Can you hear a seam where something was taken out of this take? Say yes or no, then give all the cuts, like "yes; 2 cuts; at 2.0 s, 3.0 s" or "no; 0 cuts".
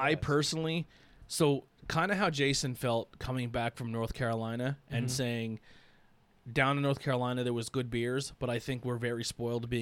no; 0 cuts